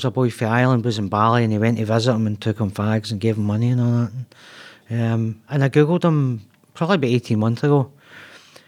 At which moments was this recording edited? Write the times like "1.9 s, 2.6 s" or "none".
none